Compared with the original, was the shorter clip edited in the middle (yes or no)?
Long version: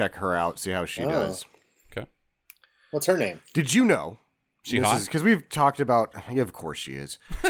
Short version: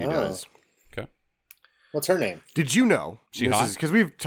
yes